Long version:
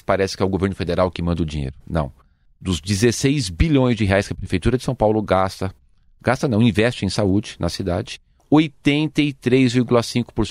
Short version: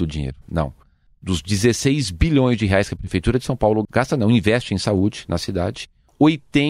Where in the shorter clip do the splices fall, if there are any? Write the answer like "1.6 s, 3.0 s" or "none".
3.8 s